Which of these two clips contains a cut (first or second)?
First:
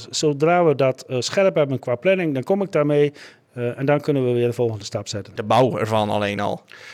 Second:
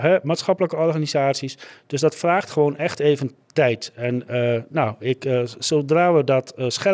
first